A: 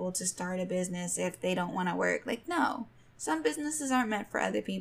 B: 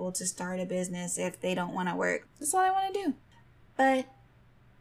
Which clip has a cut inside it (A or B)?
B